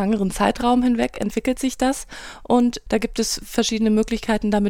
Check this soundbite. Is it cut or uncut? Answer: uncut